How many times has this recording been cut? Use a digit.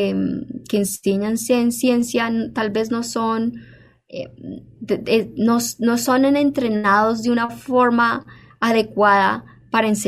1